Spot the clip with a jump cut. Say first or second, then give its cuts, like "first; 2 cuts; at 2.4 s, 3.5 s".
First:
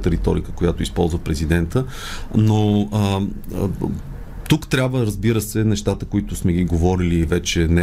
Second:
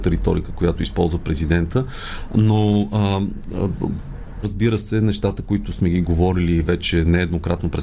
second; 1 cut; at 4.4 s